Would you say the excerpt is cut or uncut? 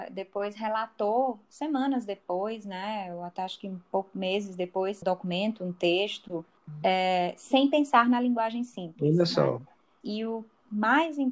cut